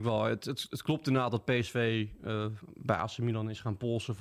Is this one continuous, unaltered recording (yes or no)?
yes